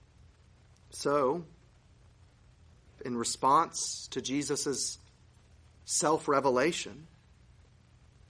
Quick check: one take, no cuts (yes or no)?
no